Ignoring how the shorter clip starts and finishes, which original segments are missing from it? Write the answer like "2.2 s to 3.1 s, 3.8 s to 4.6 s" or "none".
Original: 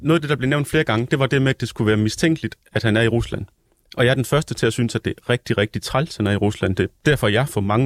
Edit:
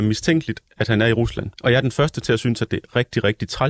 3.5 s to 3.9 s